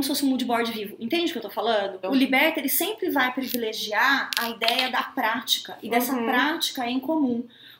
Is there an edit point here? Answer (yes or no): yes